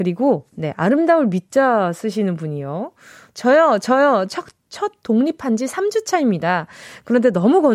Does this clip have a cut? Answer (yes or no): no